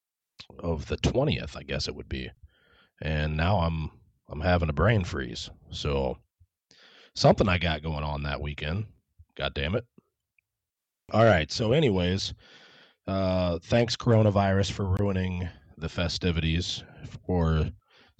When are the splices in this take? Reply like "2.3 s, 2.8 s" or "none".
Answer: none